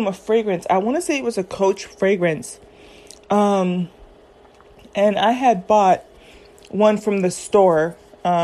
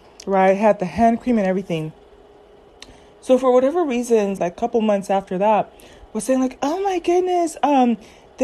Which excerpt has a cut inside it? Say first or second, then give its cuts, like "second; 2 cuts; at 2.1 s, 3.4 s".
second; 1 cut; at 4.4 s